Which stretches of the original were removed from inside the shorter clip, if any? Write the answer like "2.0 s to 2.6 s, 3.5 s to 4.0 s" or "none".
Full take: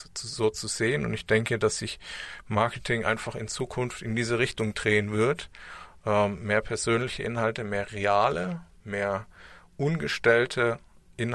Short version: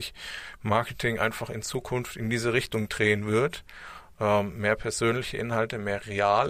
none